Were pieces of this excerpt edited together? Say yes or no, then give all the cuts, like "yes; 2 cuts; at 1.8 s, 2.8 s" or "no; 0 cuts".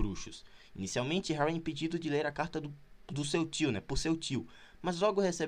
no; 0 cuts